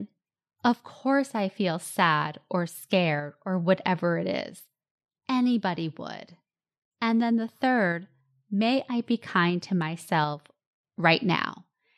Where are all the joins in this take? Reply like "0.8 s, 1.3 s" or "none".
none